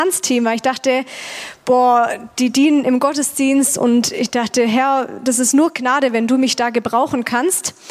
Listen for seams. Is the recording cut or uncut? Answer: uncut